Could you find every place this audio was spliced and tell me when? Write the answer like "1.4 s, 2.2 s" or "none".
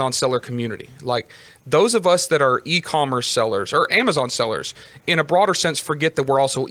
none